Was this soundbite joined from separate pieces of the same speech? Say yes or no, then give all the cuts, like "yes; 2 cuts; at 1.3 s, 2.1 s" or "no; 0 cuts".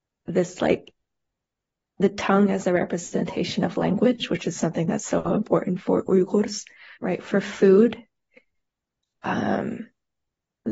yes; 1 cut; at 6.9 s